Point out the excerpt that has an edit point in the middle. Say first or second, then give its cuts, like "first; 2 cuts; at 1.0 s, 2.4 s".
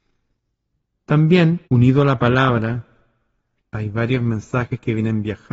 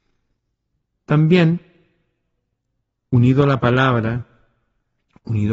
first; 2 cuts; at 1.6 s, 3.6 s